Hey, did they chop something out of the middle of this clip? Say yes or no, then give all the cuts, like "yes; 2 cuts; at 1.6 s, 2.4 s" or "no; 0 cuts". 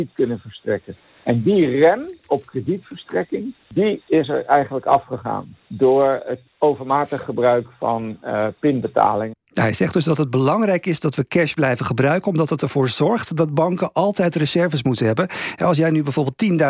no; 0 cuts